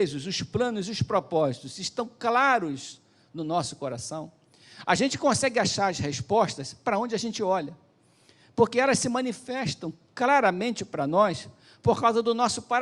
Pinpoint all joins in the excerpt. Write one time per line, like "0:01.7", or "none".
none